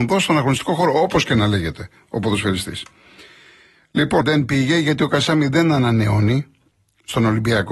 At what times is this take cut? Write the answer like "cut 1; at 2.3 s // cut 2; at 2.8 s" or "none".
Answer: cut 1; at 4.2 s